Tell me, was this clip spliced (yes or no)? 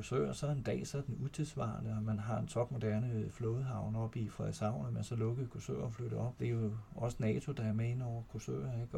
yes